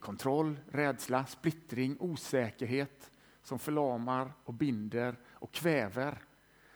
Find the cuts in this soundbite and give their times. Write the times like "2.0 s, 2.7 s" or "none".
none